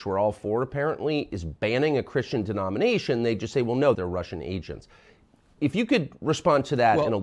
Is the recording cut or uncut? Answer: cut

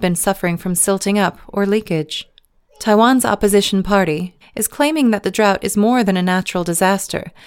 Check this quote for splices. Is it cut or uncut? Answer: cut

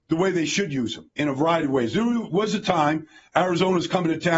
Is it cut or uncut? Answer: uncut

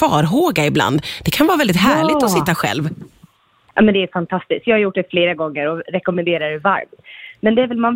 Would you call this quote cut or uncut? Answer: uncut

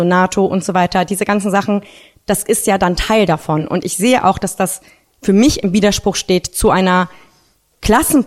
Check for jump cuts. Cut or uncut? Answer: uncut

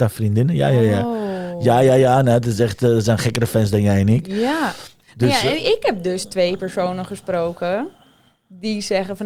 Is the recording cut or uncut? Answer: uncut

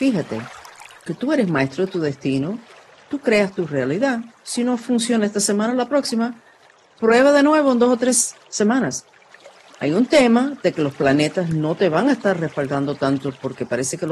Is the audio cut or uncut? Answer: uncut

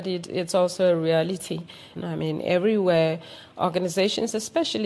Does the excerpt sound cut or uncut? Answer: cut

